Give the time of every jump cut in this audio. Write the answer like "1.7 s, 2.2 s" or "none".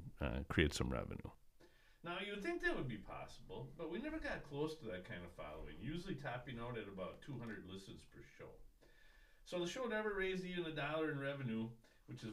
none